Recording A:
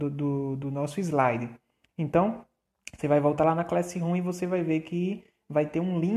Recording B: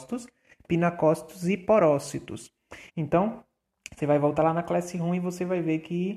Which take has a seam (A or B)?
B